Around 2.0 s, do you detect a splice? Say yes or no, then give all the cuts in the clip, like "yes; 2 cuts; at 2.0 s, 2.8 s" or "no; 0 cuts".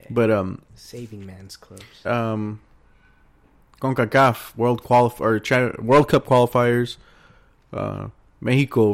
yes; 1 cut; at 2.0 s